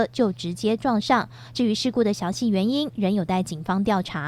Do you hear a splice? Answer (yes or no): no